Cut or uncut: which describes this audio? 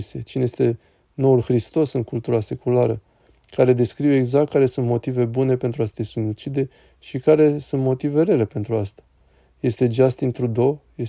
uncut